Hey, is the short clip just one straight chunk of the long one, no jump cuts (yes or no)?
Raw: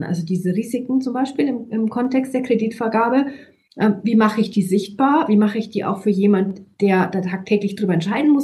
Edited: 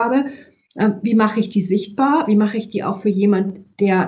yes